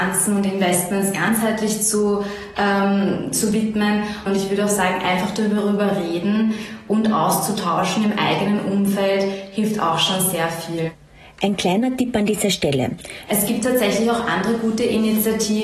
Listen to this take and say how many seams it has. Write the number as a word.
two